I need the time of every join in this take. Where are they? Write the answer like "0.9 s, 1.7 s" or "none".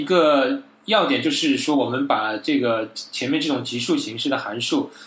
none